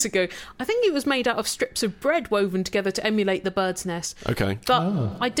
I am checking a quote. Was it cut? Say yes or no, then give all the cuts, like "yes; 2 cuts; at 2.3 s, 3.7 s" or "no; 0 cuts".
no; 0 cuts